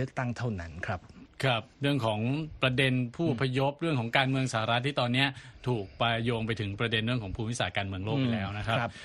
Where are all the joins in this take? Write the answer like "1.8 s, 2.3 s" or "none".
1.7 s